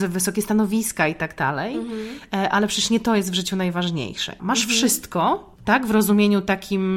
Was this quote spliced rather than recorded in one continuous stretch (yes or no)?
yes